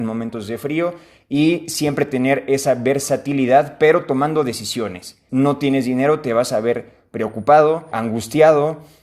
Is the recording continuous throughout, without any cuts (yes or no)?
no